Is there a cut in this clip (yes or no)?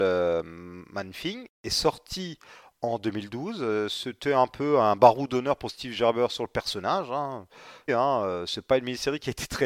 yes